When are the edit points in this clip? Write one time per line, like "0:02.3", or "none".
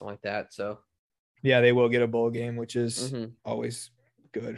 0:01.4
0:03.4